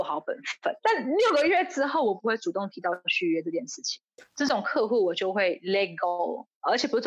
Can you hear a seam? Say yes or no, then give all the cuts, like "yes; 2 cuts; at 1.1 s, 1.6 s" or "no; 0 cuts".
no; 0 cuts